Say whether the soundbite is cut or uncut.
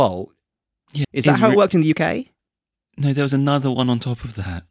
cut